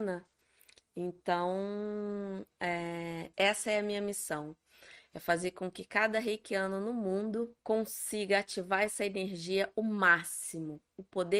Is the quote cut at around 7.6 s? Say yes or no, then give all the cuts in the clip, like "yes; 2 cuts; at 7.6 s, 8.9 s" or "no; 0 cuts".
yes; 2 cuts; at 3.3 s, 7.6 s